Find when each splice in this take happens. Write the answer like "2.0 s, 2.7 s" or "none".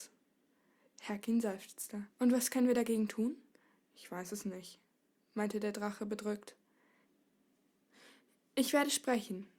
2.1 s